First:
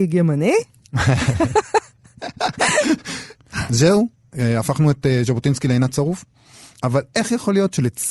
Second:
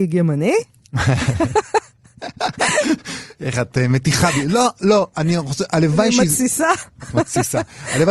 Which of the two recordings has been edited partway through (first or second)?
first